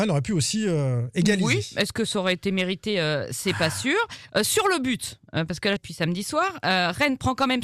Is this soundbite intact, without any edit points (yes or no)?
no